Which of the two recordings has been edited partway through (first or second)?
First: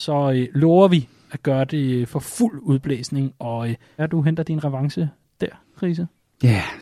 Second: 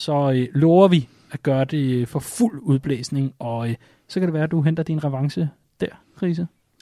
first